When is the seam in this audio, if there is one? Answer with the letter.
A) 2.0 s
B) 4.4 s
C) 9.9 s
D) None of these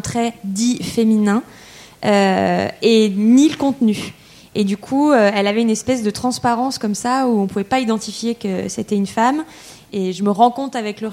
C